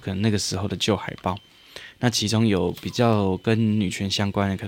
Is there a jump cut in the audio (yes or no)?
no